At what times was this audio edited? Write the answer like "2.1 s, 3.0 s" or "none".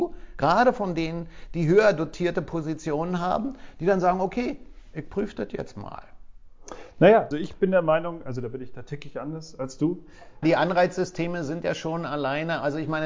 7.3 s, 10.4 s